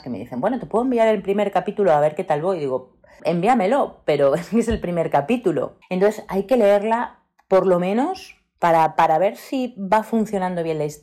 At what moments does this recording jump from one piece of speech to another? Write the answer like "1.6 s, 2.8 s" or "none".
3.2 s, 5.8 s